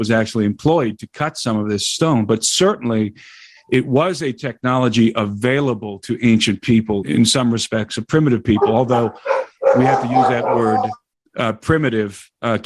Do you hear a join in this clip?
yes; 1 cut; at 7.0 s

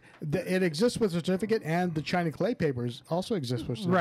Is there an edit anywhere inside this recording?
no; 0 cuts

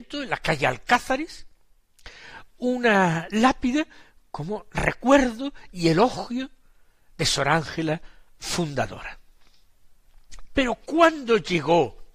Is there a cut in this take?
yes; 1 cut; at 10.5 s

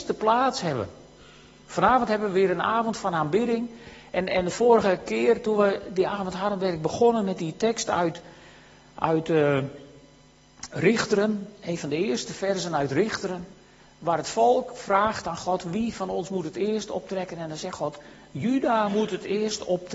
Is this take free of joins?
yes; 0 cuts

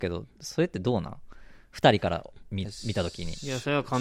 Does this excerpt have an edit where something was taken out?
no; 0 cuts

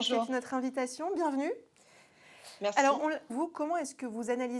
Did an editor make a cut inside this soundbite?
yes; 1 cut; at 3.3 s

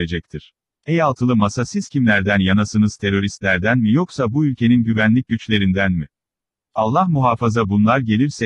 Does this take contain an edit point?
yes; 1 cut; at 6.6 s

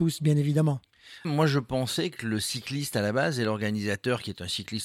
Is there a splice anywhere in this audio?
yes; 1 cut; at 1.2 s

